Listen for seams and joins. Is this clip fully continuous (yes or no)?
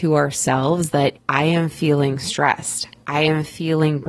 no